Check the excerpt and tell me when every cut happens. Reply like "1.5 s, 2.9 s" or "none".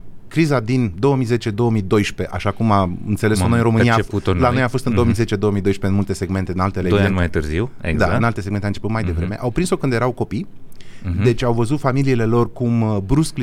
none

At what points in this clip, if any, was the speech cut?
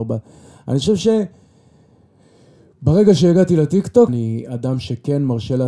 4.1 s

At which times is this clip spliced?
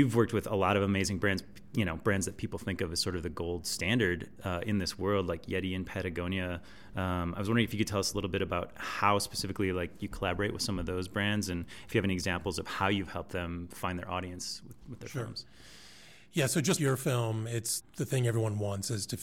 16.8 s, 17.8 s

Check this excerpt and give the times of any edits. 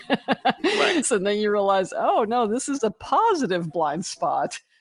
1.0 s

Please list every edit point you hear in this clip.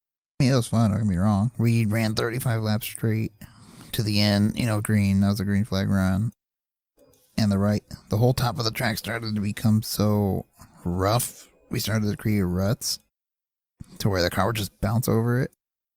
none

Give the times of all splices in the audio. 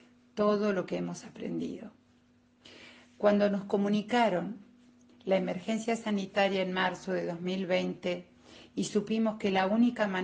none

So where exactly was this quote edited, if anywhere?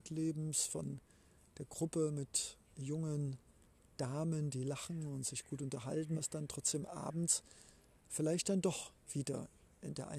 6.1 s

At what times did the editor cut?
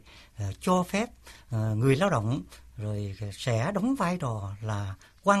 none

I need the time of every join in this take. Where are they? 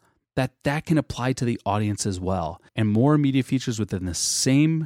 2.7 s

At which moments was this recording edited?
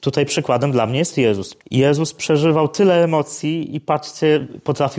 1.6 s

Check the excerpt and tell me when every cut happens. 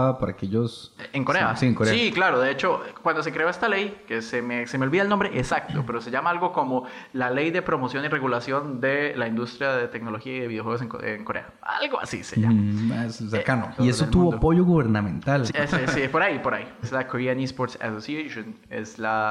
13.8 s, 15.5 s, 16.8 s

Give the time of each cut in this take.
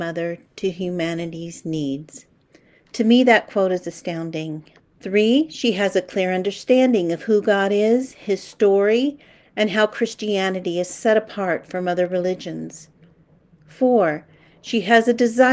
4.8 s

